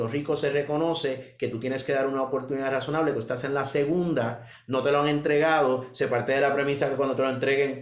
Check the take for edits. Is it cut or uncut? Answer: uncut